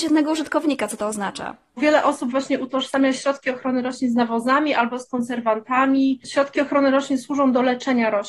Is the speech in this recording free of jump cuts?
yes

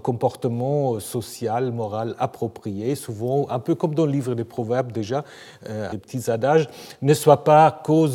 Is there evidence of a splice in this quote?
yes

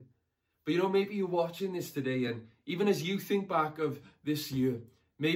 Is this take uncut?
yes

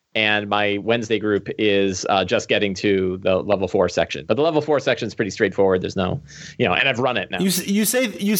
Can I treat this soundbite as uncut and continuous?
yes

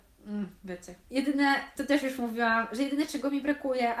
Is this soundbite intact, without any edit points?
yes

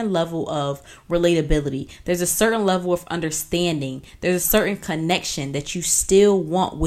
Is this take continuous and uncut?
yes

